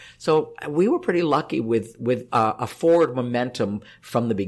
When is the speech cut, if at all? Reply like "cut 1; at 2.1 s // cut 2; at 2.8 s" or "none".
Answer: cut 1; at 2.3 s